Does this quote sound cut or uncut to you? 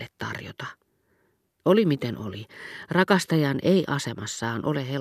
uncut